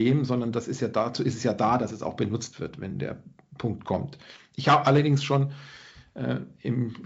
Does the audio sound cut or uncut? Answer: uncut